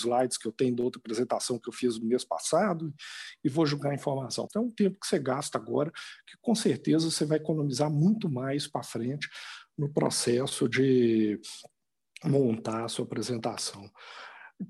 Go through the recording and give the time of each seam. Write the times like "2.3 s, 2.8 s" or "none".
4.5 s